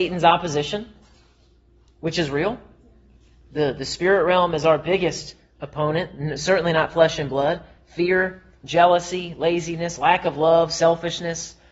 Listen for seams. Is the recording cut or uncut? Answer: uncut